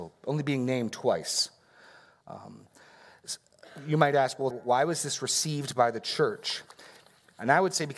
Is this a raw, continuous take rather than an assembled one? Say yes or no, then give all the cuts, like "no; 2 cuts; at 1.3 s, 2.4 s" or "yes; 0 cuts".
no; 1 cut; at 4.5 s